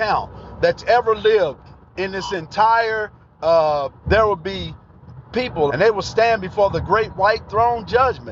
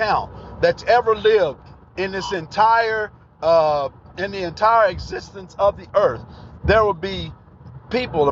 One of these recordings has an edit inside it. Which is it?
first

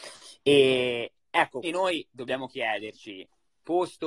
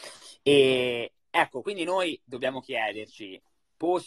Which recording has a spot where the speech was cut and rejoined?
first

